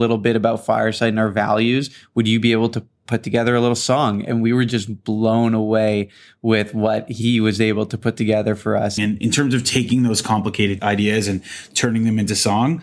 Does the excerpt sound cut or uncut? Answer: cut